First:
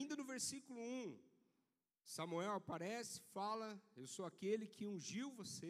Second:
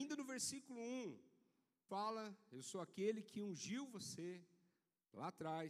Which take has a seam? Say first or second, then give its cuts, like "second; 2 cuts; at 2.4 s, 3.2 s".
second; 1 cut; at 1.9 s